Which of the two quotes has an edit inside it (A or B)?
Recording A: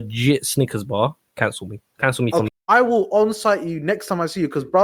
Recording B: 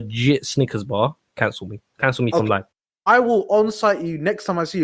A